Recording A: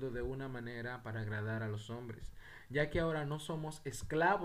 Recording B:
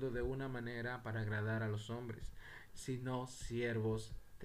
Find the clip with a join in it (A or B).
B